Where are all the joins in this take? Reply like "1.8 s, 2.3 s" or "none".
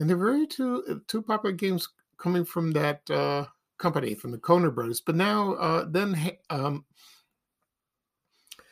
none

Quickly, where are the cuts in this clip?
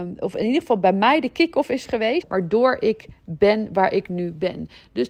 2.2 s

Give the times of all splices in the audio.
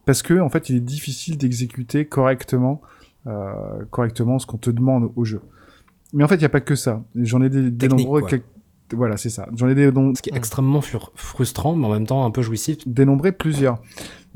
10.1 s, 12.9 s

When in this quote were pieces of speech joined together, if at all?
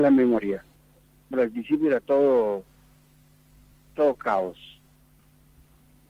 1.3 s

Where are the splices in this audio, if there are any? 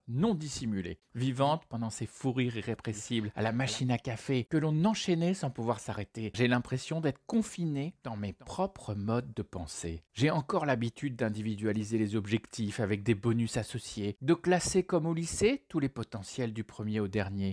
1.1 s, 6.3 s

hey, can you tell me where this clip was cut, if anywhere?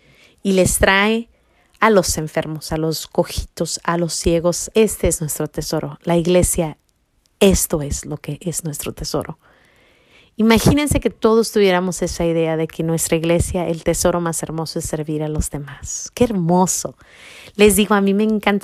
2.7 s, 4.7 s

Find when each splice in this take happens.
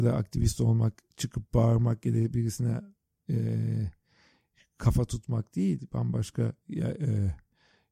none

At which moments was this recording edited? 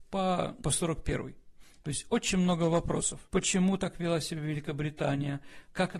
none

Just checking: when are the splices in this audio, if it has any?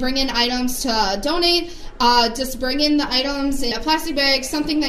3.7 s

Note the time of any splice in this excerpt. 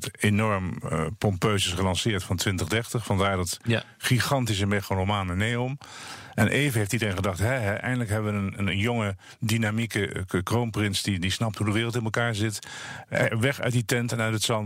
none

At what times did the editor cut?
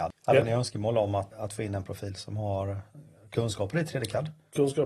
1.3 s

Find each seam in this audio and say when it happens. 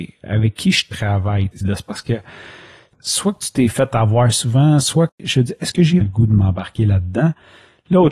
1.6 s, 6.0 s

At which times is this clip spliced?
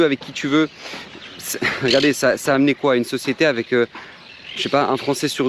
none

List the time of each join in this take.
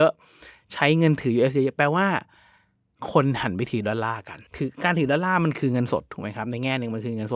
4.5 s

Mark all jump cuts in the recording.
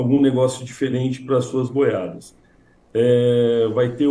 2.8 s

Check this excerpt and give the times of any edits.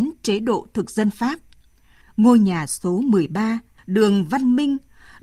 2.0 s, 3.8 s

